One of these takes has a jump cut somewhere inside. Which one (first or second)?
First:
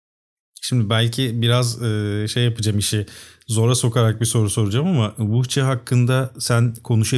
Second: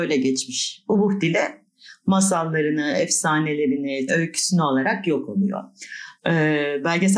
second